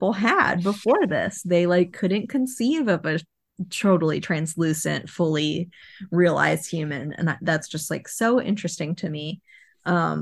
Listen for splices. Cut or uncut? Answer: uncut